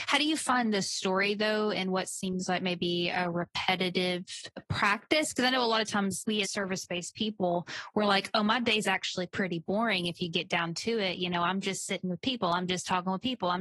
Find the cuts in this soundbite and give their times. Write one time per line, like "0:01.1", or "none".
0:06.4